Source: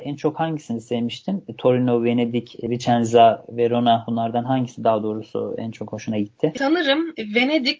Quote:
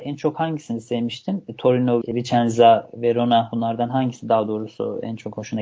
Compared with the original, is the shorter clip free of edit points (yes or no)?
no